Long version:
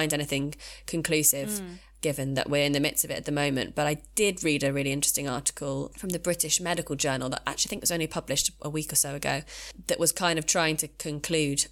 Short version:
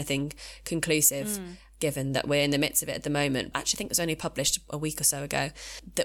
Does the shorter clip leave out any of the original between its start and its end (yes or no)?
yes